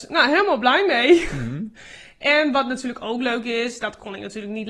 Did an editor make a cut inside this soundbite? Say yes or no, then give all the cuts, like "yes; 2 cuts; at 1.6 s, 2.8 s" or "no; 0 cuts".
no; 0 cuts